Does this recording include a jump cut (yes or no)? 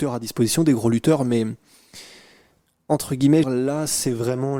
yes